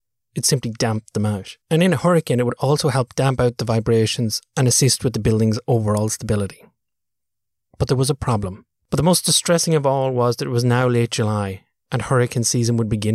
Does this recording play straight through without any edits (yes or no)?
no